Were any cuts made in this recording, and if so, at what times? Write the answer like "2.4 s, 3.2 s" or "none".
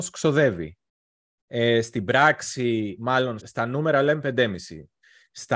1.4 s, 3.4 s